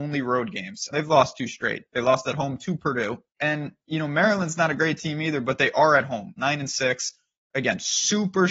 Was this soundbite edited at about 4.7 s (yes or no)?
no